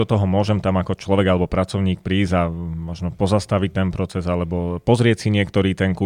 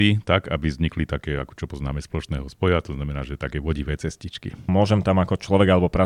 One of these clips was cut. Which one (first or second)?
second